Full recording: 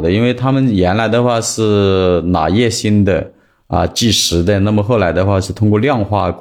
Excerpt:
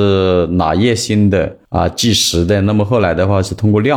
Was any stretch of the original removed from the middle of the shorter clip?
yes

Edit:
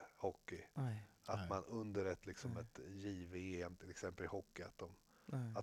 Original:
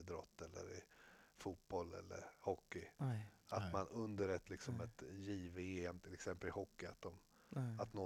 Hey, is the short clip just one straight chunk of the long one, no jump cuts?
yes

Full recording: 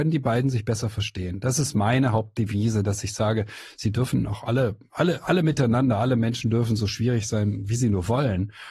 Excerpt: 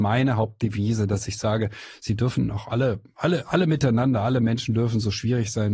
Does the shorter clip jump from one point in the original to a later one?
no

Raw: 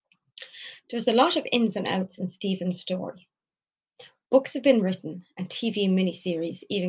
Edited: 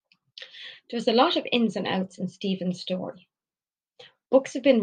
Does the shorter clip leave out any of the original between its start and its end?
no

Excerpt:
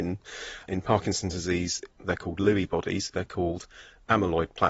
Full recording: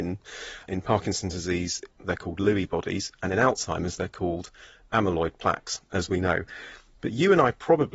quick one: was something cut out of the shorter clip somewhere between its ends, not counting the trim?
yes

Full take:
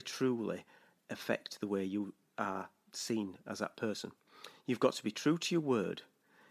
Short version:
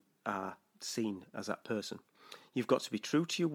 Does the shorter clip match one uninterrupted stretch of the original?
yes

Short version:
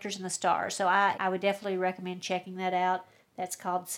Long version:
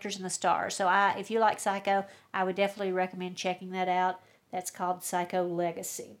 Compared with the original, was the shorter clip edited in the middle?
yes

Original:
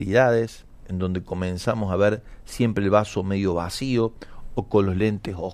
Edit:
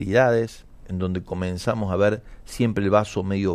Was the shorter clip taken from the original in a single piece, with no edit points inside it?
yes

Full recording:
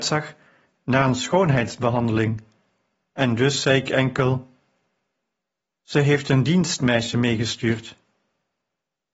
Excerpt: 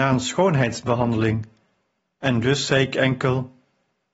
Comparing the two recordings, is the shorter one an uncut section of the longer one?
yes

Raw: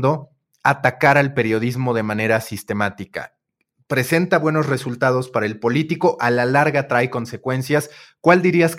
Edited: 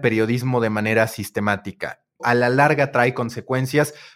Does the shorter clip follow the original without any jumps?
no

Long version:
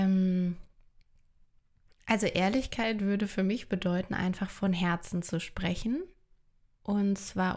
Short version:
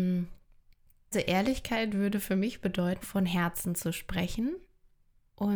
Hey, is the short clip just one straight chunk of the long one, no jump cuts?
no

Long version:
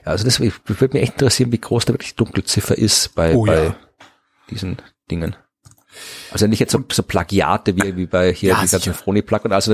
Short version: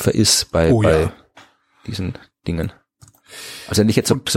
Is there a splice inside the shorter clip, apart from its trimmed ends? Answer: no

